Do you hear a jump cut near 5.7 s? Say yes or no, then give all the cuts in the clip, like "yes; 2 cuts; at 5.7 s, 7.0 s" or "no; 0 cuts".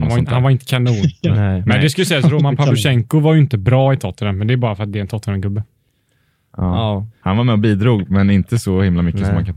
no; 1 cut; at 7.2 s